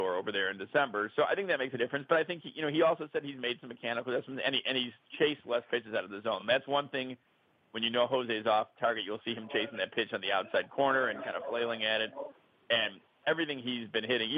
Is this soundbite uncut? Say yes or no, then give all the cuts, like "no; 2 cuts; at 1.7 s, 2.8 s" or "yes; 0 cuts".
yes; 0 cuts